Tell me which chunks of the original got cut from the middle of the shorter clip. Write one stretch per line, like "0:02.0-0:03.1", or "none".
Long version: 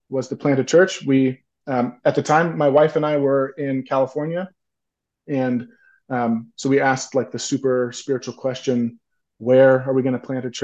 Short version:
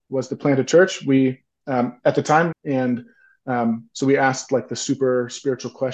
0:02.5-0:05.2